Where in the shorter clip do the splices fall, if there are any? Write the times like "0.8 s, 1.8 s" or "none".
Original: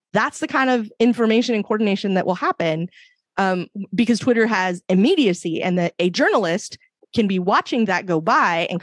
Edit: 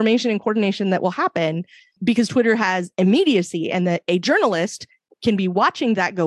2.0 s